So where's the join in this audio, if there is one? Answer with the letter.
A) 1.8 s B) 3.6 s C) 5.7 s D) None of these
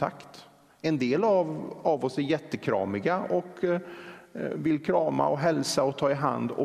D